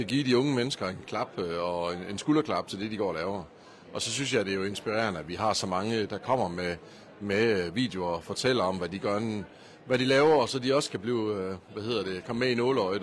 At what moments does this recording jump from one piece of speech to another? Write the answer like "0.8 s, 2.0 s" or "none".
6.1 s